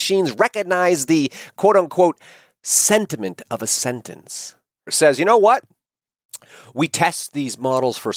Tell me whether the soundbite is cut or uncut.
cut